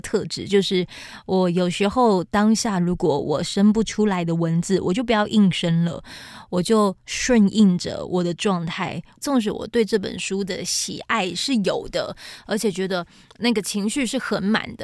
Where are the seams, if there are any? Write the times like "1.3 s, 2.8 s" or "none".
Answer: 9.2 s